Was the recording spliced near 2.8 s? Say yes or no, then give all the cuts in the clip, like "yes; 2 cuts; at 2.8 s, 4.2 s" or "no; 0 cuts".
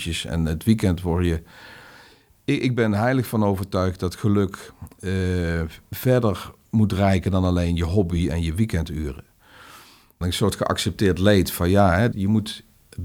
no; 2 cuts; at 10.2 s, 12.1 s